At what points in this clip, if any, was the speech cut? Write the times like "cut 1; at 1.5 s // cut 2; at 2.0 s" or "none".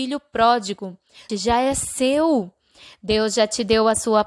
cut 1; at 1.3 s